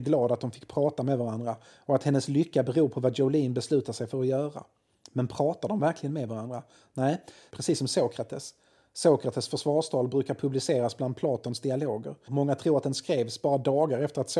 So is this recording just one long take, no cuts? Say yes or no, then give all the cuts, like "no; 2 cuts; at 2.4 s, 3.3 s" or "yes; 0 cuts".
no; 2 cuts; at 7.5 s, 12.3 s